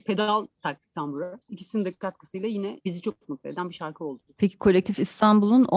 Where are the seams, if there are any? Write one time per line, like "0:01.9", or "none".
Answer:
0:01.4